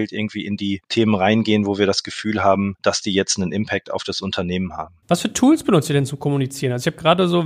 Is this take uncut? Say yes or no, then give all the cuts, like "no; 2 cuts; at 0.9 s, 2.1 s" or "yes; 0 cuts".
yes; 0 cuts